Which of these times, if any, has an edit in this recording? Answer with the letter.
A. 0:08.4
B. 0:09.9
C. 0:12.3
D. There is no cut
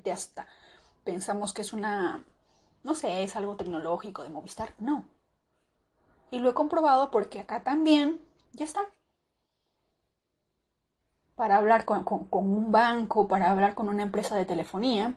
A